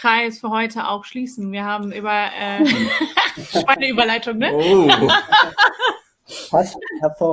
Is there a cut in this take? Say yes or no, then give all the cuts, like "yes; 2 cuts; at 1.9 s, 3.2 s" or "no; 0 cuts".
no; 0 cuts